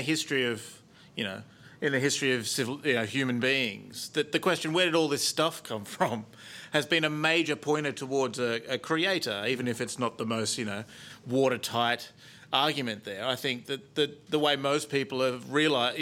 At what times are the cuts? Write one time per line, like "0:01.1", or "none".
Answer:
none